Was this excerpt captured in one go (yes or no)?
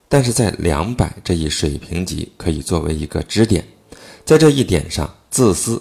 yes